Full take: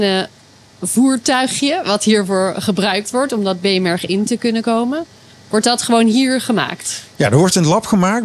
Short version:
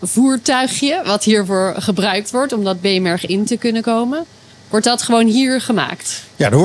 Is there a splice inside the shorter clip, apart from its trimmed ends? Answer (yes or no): no